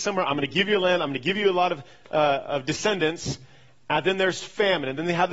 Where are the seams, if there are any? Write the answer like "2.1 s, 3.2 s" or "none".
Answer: none